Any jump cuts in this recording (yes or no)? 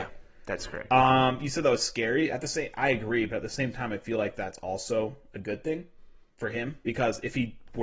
no